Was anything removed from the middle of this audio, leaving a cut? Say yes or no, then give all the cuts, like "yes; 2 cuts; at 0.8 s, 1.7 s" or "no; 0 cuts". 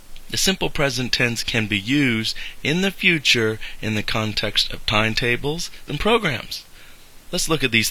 yes; 1 cut; at 5.9 s